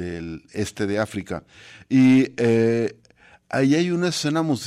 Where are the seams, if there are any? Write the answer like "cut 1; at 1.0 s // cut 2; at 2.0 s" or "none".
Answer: none